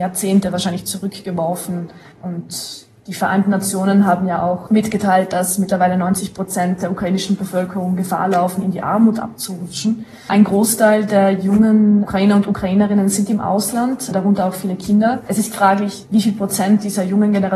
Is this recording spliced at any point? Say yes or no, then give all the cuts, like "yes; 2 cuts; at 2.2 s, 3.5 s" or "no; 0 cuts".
no; 0 cuts